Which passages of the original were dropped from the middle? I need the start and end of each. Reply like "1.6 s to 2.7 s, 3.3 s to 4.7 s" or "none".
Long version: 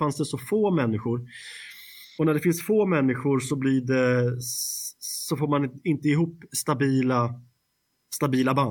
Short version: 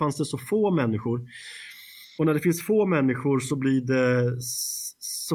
none